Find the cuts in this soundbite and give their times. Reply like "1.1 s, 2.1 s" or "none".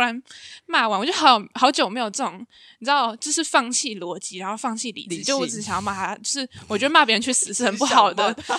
none